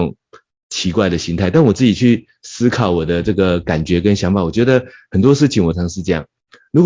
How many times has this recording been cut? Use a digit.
1